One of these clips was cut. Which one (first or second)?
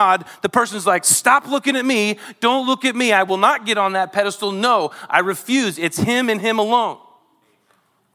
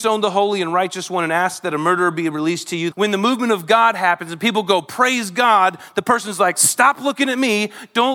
second